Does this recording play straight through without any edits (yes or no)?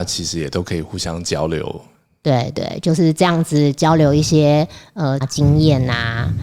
no